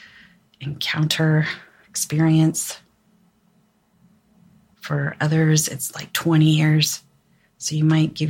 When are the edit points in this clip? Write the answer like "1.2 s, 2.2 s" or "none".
4.7 s